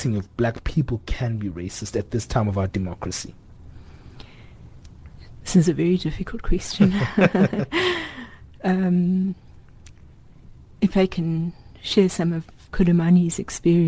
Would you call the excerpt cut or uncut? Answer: uncut